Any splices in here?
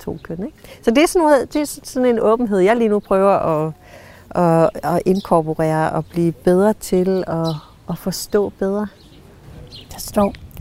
no; 0 cuts

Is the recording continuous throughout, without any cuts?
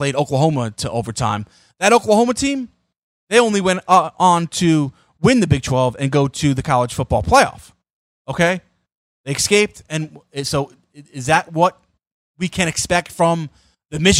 yes; 0 cuts

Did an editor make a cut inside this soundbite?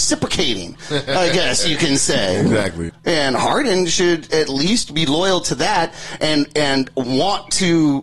yes; 1 cut; at 2.9 s

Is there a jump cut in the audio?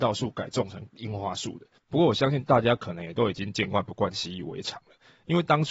yes; 1 cut; at 1.8 s

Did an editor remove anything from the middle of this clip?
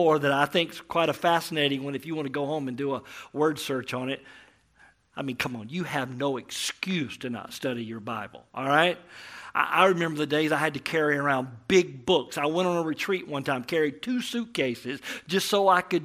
no; 0 cuts

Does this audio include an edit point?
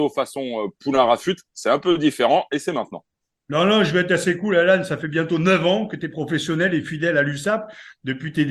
no; 0 cuts

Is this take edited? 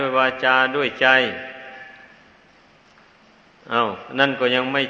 no; 0 cuts

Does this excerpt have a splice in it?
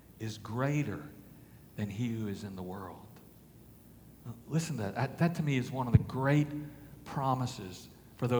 no; 0 cuts

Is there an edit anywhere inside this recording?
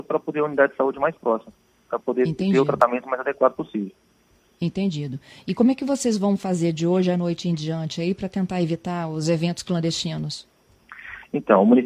no; 0 cuts

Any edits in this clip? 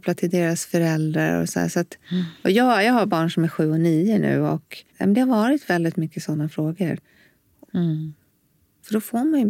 yes; 2 cuts; at 4.9 s, 7.7 s

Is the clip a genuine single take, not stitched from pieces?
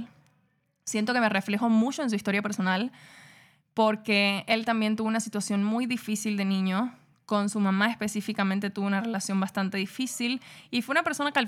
yes; 0 cuts

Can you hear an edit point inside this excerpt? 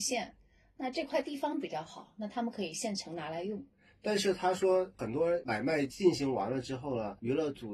no; 0 cuts

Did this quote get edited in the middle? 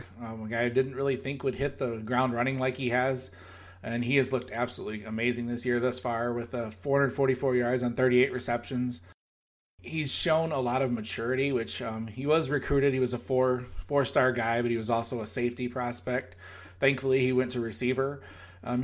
no; 0 cuts

